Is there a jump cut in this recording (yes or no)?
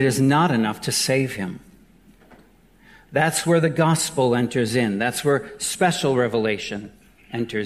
no